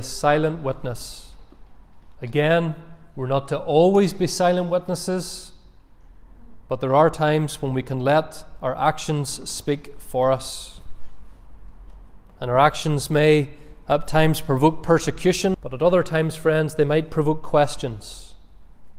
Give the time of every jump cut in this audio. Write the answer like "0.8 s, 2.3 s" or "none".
15.5 s